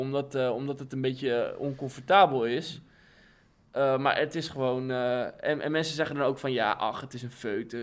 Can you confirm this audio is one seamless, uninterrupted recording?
yes; 0 cuts

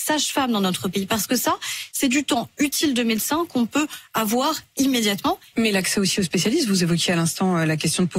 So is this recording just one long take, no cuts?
no; 1 cut; at 5.5 s

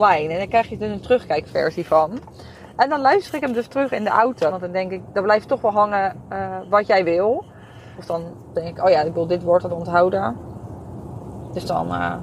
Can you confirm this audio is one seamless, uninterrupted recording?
no; 3 cuts; at 4.5 s, 8.0 s, 9.7 s

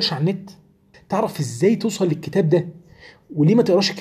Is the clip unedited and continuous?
no; 1 cut; at 0.9 s

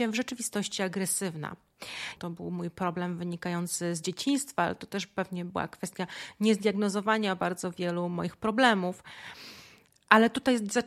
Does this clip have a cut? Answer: yes; 1 cut; at 2.2 s

